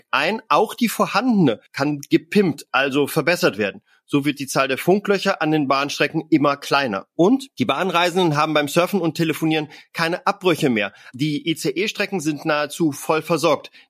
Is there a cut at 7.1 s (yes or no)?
no